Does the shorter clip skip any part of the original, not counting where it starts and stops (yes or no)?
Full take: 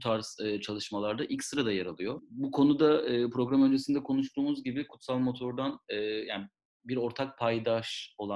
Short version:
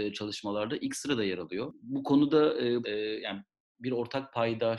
yes